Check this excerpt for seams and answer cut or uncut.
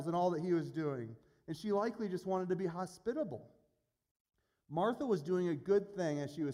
uncut